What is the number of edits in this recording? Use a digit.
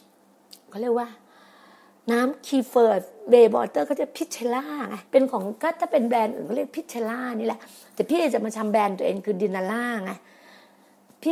1